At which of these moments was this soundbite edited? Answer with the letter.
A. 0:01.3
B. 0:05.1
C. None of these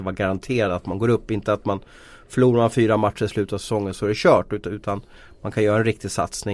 C